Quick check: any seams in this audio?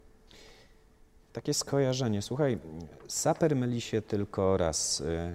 no; 0 cuts

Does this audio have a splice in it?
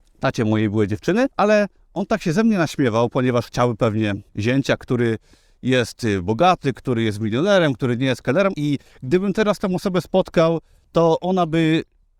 yes; 3 cuts; at 1.3 s, 4.3 s, 8.5 s

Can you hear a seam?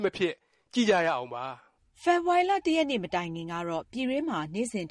no; 0 cuts

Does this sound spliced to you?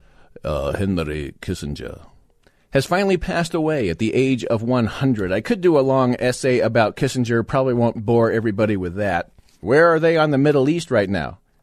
yes; 1 cut; at 9.6 s

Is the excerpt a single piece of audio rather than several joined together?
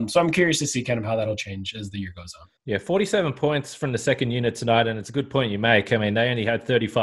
no; 1 cut; at 2.6 s

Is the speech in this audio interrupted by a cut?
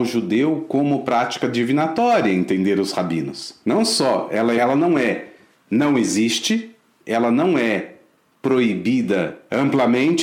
yes; 1 cut; at 4.6 s

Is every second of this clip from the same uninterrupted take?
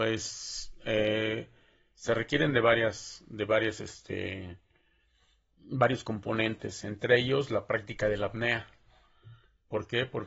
yes; 0 cuts

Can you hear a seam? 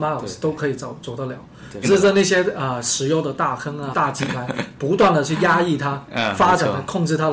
yes; 2 cuts; at 1.8 s, 3.9 s

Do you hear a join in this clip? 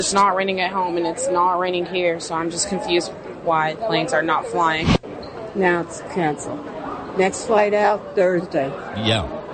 yes; 1 cut; at 5.0 s

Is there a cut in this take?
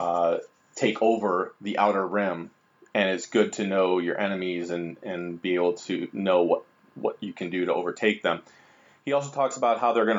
no; 0 cuts

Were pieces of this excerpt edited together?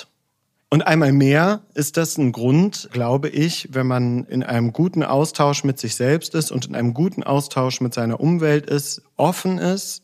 no; 0 cuts

